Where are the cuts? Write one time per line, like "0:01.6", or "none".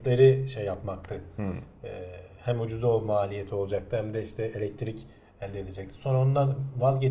none

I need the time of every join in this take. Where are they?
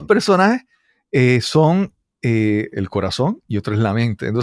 0:02.7

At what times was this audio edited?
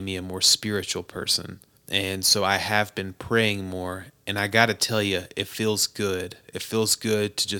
none

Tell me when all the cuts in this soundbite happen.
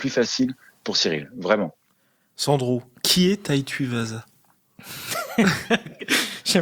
none

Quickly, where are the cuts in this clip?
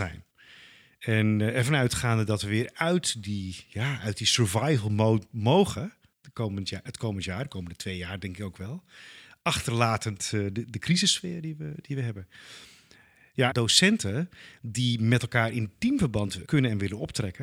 0:13.5
0:16.4

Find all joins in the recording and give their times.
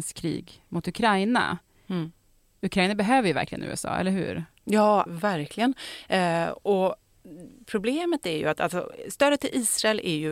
0:05.1

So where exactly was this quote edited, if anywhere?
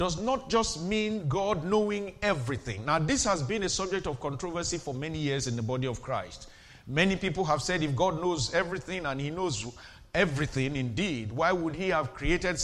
none

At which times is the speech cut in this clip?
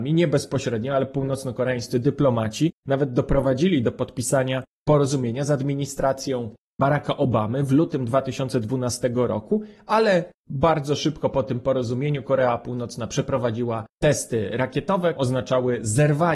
0:15.2

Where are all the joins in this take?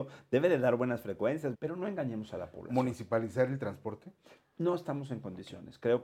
0:01.5

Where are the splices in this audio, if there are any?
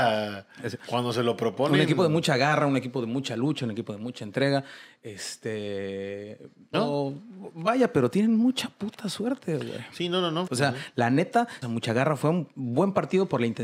0:06.7
0:10.5
0:11.6

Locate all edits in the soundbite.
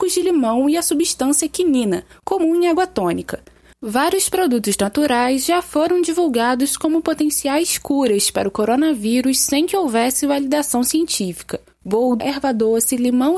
0:03.7
0:12.2

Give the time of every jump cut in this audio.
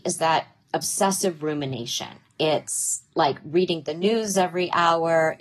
0:02.3

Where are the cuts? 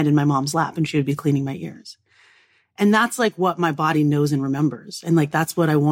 none

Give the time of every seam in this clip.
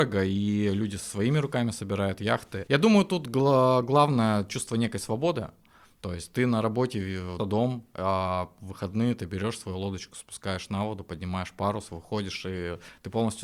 0:07.4

